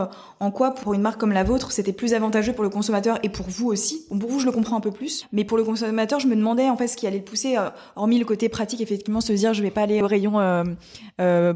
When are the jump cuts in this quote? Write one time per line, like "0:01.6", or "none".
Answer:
none